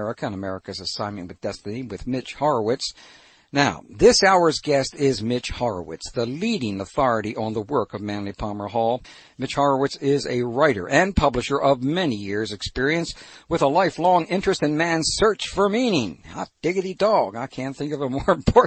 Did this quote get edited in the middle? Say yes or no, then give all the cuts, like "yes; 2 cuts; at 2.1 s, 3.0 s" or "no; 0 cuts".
no; 0 cuts